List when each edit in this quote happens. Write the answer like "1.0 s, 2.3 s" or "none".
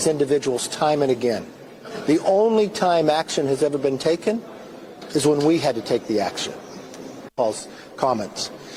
7.3 s